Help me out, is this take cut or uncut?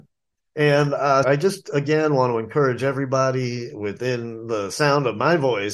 cut